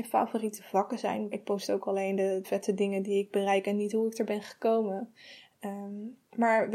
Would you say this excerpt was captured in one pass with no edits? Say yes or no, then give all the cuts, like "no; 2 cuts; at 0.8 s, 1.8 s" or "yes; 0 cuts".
no; 2 cuts; at 1.3 s, 2.4 s